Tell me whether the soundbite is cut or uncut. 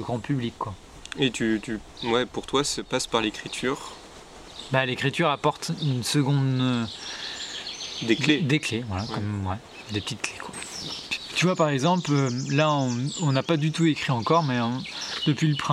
uncut